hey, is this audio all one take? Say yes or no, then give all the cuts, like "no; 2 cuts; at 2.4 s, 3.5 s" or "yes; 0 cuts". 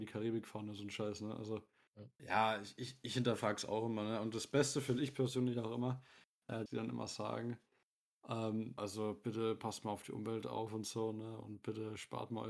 no; 3 cuts; at 2.2 s, 6.7 s, 8.8 s